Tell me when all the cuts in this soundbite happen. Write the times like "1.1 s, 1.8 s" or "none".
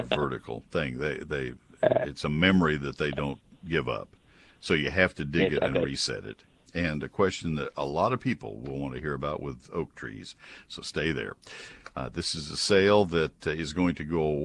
6.6 s, 11.9 s